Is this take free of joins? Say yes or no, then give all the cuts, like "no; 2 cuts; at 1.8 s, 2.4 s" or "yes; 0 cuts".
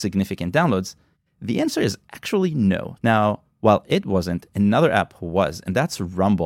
no; 1 cut; at 3.0 s